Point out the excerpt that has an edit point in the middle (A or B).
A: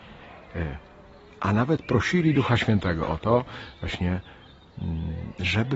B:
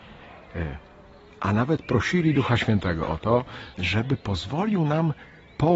B